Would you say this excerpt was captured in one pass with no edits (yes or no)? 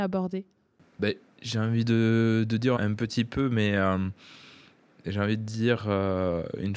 no